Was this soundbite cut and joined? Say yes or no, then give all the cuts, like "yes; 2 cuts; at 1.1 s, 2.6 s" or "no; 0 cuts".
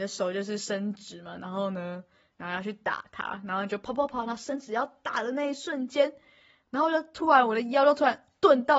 no; 0 cuts